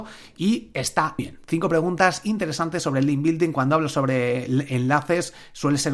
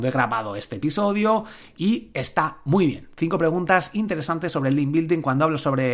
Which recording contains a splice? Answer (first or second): first